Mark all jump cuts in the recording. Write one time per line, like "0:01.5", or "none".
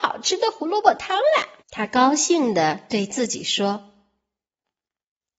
0:01.6

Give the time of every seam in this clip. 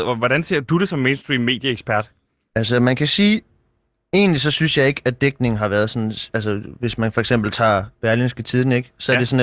none

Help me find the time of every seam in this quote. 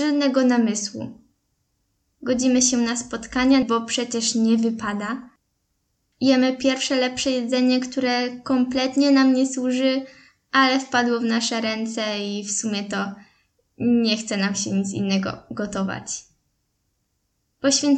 0:03.6

